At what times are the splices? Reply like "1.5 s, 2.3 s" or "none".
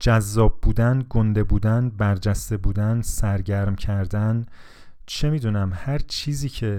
none